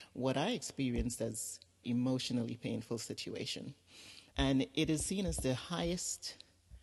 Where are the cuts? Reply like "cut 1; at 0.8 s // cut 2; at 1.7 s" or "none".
cut 1; at 1.8 s // cut 2; at 4.3 s